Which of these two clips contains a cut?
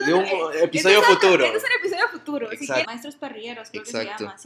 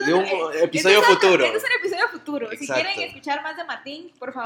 first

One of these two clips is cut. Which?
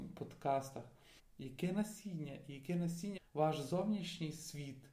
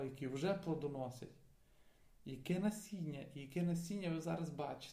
first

